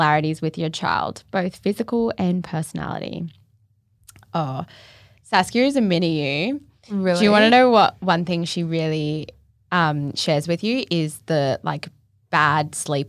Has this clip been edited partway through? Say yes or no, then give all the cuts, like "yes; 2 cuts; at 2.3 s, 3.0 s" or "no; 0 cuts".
no; 0 cuts